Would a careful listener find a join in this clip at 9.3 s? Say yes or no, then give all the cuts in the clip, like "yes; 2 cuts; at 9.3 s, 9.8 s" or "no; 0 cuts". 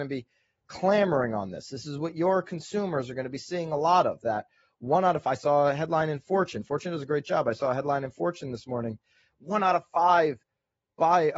no; 0 cuts